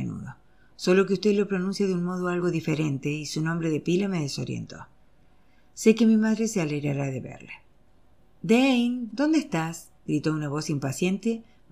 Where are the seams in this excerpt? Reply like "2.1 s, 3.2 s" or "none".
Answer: 9.1 s